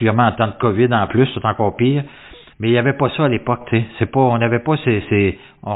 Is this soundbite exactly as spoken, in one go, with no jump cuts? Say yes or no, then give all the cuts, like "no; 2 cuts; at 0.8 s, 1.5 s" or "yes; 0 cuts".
no; 1 cut; at 2.5 s